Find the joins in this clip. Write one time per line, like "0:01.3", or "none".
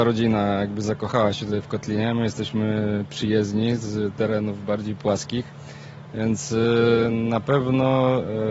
0:06.1